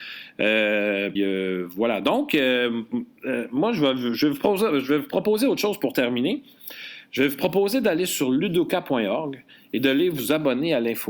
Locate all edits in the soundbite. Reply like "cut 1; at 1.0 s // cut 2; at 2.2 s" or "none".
cut 1; at 1.2 s